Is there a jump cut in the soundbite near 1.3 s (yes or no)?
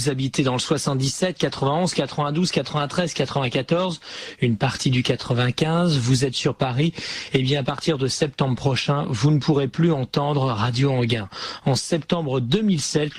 no